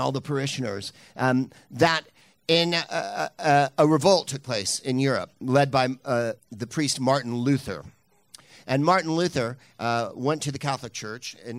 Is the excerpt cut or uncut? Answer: cut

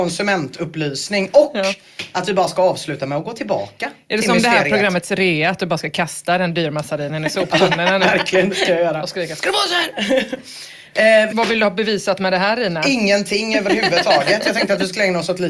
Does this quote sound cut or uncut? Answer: cut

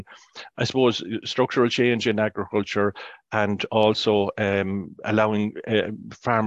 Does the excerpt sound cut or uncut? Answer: uncut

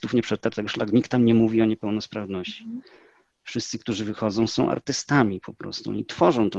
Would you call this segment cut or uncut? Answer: uncut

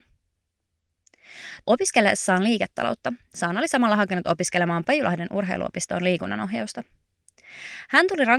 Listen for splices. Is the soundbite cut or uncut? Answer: cut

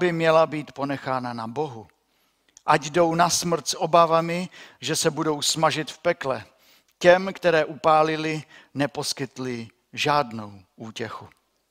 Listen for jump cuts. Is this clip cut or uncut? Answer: uncut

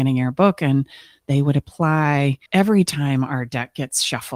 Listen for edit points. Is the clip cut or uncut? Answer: cut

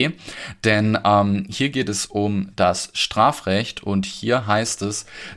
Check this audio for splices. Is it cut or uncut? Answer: uncut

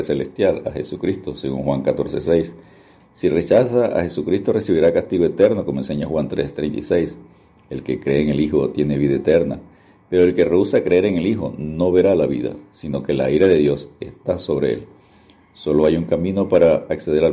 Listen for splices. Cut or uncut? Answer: cut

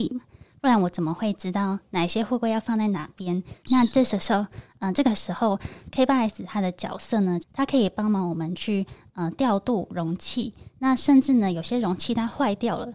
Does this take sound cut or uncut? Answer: cut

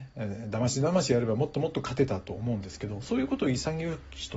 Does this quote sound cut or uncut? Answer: uncut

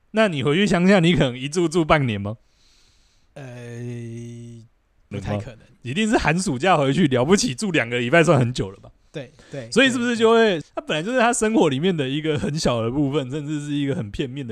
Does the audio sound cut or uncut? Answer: cut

